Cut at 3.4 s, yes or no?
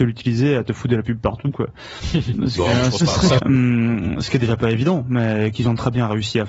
yes